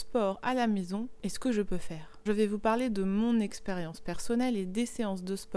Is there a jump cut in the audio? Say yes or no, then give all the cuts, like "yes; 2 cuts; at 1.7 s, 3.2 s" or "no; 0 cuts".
yes; 1 cut; at 2.3 s